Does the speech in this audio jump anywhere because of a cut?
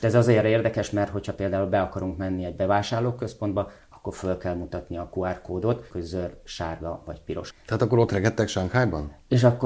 yes; 2 cuts; at 5.9 s, 7.5 s

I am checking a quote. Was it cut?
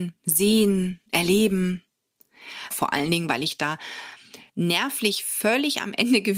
yes; 2 cuts; at 2.7 s, 4.5 s

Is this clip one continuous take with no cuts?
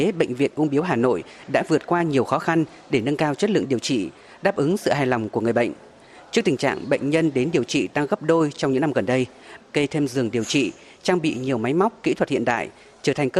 no; 1 cut; at 9.6 s

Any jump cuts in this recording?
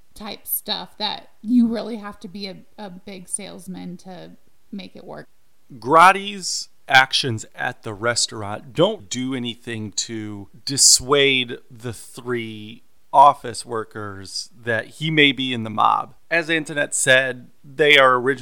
yes; 1 cut; at 9.0 s

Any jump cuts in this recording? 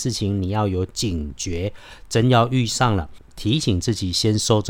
no; 0 cuts

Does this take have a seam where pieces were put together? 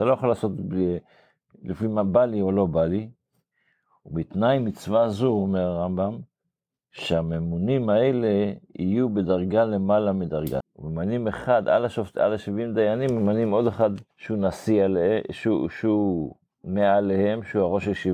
yes; 2 cuts; at 10.6 s, 14.1 s

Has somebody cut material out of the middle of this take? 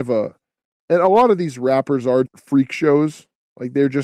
yes; 1 cut; at 2.3 s

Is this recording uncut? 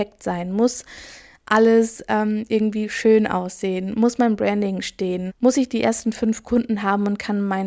no; 1 cut; at 5.3 s

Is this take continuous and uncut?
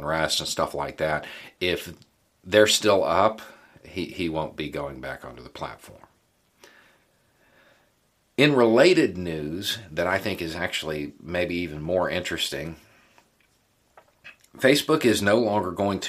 yes; 0 cuts

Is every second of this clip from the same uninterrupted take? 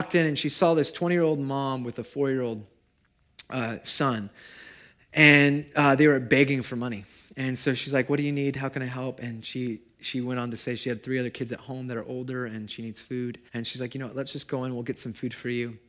no; 1 cut; at 13.5 s

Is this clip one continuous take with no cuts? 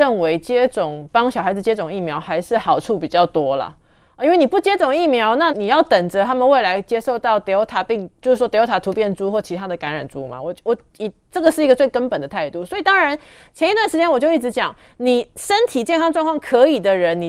no; 1 cut; at 5.5 s

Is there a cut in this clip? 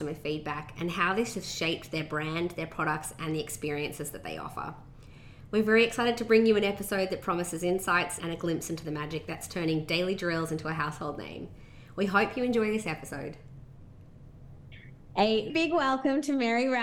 yes; 2 cuts; at 8.2 s, 15.5 s

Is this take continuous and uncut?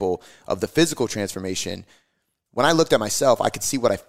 yes; 0 cuts

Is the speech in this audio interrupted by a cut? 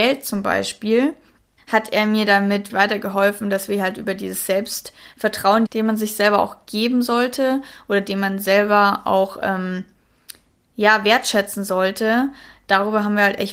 yes; 3 cuts; at 1.6 s, 2.7 s, 5.7 s

